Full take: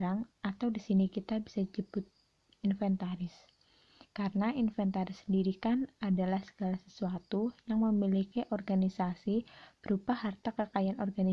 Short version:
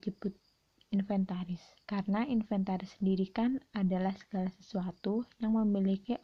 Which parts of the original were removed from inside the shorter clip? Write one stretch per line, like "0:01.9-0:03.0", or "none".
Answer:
0:03.5-0:04.1